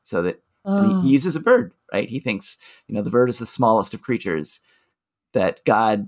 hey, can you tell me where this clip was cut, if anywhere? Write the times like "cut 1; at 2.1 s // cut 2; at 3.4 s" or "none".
none